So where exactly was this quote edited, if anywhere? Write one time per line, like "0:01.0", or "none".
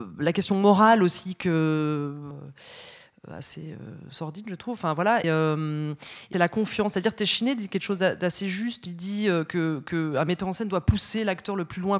0:02.3
0:05.2
0:06.3